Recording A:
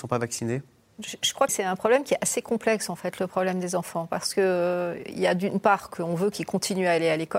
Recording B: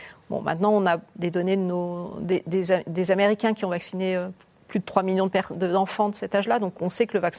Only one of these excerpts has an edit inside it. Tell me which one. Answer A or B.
A